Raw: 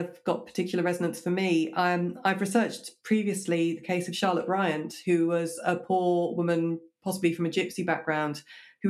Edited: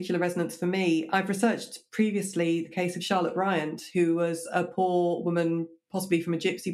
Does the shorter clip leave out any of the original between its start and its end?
yes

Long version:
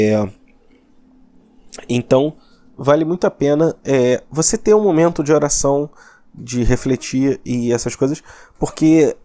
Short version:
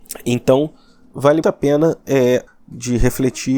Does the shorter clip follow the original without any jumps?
no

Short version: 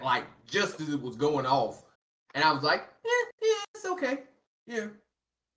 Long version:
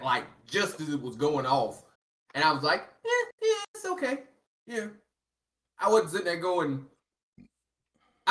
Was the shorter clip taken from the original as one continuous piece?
yes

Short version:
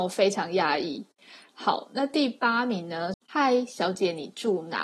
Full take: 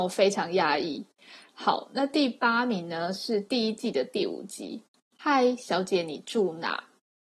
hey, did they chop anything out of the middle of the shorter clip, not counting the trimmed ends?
yes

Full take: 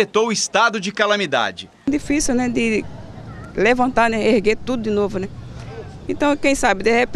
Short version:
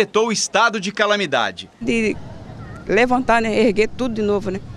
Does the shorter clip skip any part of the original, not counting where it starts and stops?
yes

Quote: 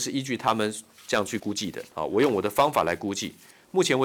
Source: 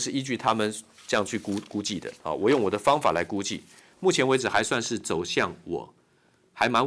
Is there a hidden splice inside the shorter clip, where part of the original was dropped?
yes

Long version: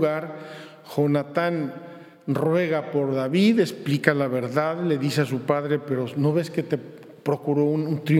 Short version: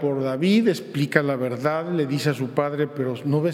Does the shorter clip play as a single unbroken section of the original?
yes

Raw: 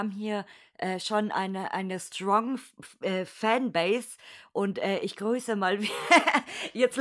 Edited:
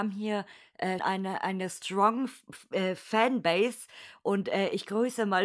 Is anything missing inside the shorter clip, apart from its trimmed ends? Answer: yes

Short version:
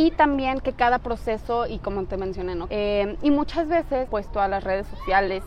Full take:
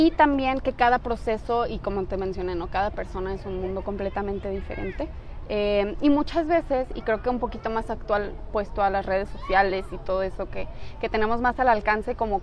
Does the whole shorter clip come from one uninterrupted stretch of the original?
no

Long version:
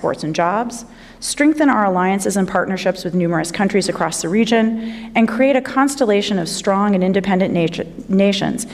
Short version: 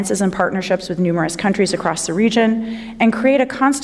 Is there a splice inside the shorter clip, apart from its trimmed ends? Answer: no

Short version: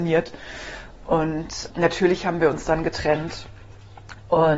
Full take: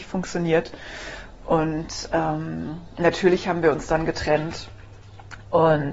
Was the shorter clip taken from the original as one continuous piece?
no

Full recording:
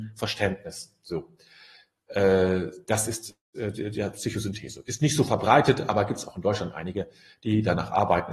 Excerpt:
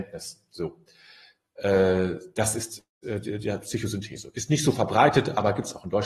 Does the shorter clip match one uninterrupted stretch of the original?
yes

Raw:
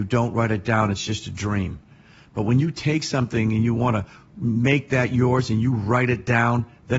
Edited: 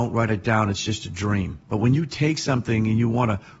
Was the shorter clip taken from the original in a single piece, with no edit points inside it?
no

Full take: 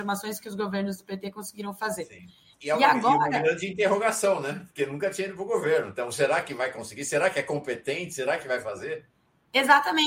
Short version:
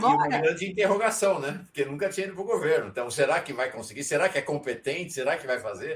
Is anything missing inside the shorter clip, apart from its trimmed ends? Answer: no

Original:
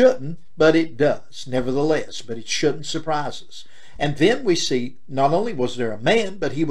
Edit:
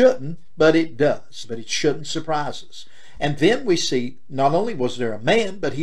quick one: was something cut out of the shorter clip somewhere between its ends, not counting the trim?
yes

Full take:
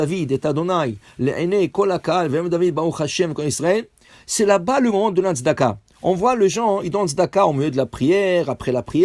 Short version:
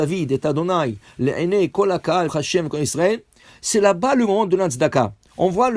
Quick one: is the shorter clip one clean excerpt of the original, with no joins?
no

